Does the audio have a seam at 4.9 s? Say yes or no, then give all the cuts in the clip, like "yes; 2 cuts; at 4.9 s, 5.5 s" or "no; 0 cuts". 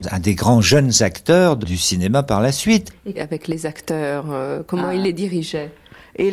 no; 1 cut; at 3.1 s